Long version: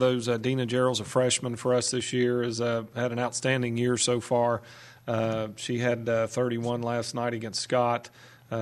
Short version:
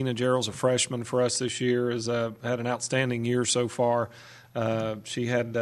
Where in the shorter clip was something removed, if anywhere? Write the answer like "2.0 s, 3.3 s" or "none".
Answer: none